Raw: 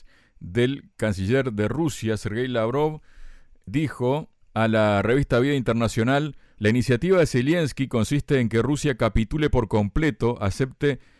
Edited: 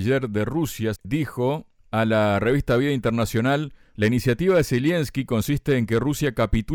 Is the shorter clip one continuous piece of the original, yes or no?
no